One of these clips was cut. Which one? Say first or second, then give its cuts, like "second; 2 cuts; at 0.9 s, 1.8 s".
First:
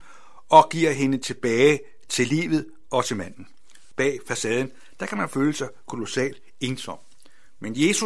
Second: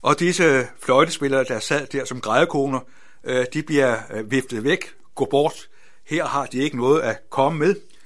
first; 1 cut; at 3.9 s